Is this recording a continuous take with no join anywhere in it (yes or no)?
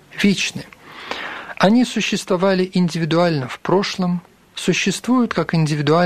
yes